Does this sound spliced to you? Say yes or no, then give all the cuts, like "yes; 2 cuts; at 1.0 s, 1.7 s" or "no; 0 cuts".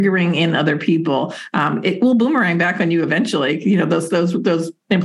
no; 0 cuts